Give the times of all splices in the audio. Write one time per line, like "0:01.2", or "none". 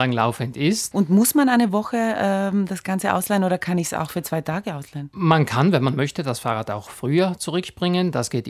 0:00.9